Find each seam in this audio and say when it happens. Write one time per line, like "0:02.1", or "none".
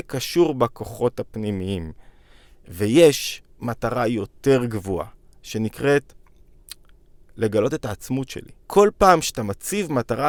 0:08.6